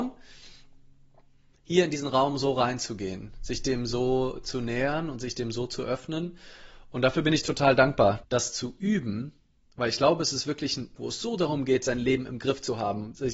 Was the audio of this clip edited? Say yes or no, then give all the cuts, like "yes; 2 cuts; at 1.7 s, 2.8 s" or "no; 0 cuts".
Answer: yes; 2 cuts; at 8.2 s, 11.0 s